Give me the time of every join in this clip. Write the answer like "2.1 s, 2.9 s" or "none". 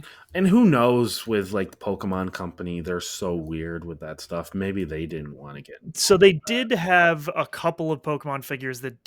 none